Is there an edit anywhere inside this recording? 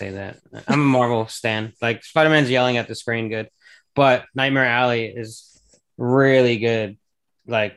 yes; 1 cut; at 1.7 s

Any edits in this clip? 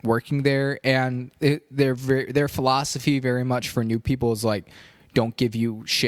no; 0 cuts

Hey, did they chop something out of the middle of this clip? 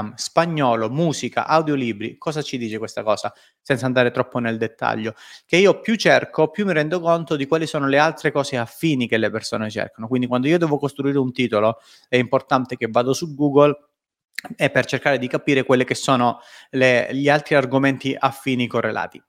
no; 0 cuts

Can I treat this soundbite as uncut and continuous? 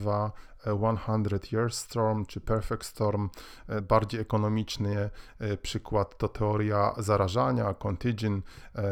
no; 1 cut; at 3.8 s

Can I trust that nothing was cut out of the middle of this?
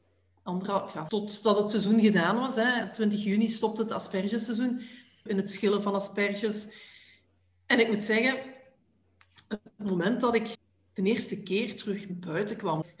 no; 2 cuts; at 1.1 s, 5.3 s

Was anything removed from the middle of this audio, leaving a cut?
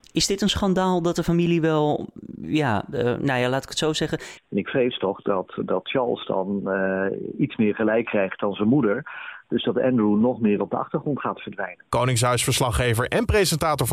yes; 1 cut; at 4.4 s

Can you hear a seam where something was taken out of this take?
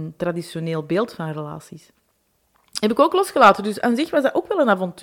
no; 0 cuts

